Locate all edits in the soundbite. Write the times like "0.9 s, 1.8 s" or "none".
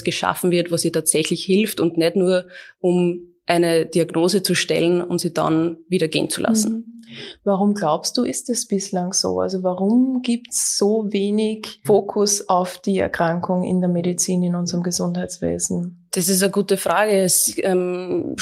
none